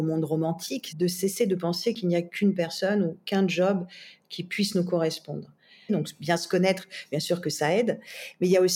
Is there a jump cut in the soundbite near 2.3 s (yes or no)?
no